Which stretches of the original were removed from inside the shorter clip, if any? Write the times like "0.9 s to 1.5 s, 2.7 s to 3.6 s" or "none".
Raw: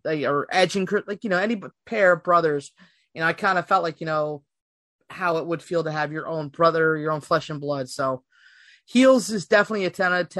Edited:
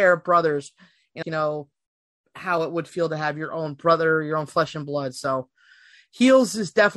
3.2 s to 4.0 s